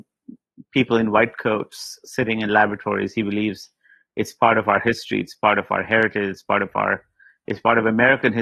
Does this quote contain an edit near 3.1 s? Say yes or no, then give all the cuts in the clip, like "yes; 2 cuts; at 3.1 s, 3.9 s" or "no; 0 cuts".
no; 0 cuts